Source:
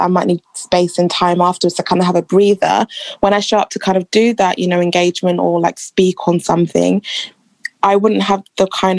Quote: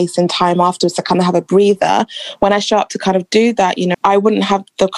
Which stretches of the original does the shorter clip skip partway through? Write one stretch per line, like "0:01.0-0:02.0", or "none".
0:04.7-0:07.7